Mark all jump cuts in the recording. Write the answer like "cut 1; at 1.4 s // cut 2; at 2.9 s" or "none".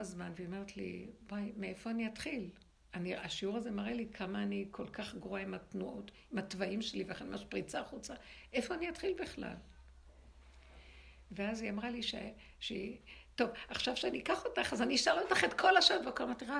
none